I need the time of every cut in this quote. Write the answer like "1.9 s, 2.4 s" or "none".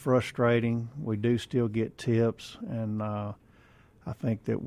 2.6 s